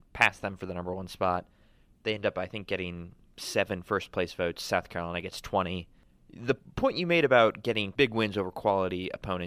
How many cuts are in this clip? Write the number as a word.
zero